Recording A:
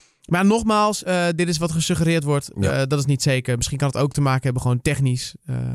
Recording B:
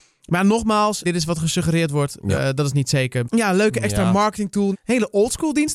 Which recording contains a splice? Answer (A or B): B